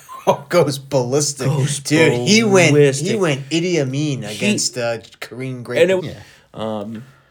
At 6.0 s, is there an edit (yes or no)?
yes